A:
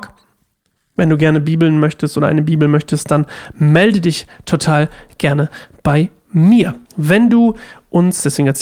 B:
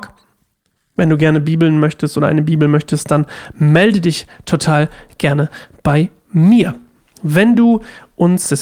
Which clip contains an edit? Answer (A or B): A